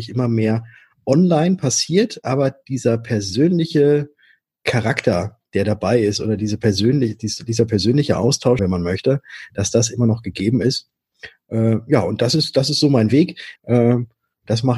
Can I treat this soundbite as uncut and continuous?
no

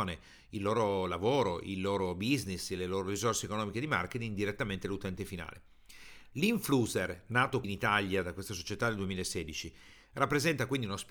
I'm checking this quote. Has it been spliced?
yes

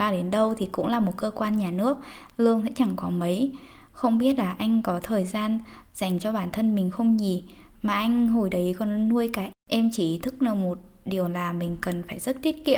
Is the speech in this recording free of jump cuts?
no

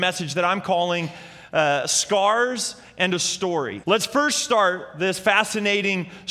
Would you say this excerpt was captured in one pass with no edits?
no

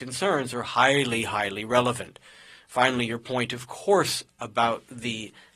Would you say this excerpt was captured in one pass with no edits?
yes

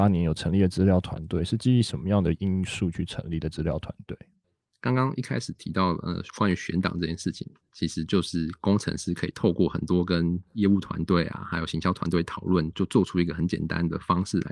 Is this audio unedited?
yes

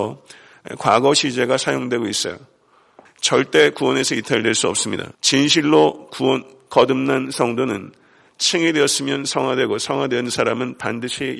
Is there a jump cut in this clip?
yes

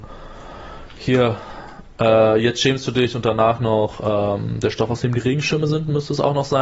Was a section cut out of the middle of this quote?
no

